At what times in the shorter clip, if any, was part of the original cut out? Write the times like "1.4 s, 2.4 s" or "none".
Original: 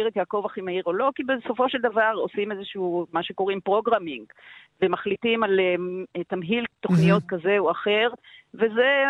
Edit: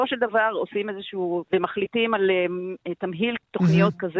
1.4 s